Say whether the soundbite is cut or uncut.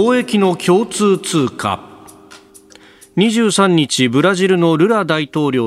uncut